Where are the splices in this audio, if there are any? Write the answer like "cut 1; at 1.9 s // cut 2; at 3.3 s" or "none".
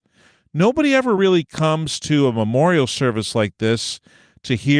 none